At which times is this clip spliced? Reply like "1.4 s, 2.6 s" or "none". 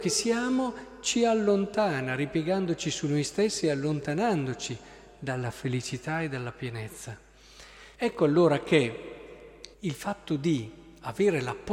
7.9 s, 9.7 s